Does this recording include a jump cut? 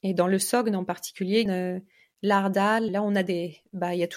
yes; 2 cuts; at 1.5 s, 2.9 s

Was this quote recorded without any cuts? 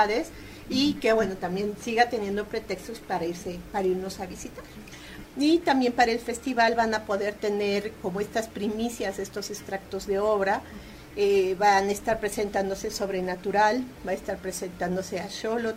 no; 1 cut; at 5.2 s

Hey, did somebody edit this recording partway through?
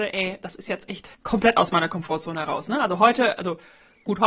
yes; 1 cut; at 1.1 s

